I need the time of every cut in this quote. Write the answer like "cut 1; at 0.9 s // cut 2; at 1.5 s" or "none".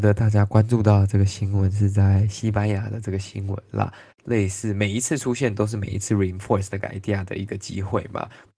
cut 1; at 4.1 s